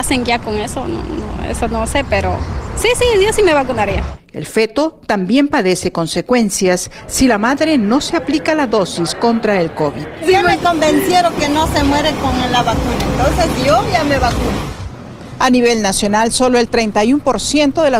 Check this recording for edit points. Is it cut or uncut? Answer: uncut